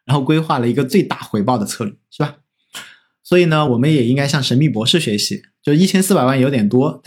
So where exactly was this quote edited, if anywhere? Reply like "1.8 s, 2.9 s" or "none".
none